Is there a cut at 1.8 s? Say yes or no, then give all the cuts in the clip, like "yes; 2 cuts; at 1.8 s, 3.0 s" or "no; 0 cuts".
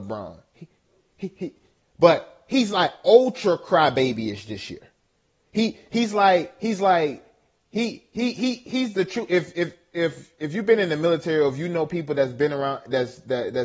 yes; 1 cut; at 1.8 s